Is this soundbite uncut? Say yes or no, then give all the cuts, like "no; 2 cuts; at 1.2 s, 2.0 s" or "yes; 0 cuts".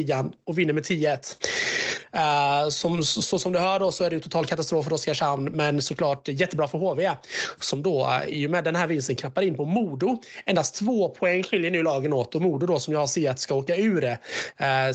yes; 0 cuts